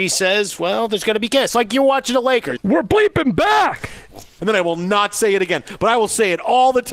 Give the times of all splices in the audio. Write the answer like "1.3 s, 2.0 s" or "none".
2.6 s, 4.4 s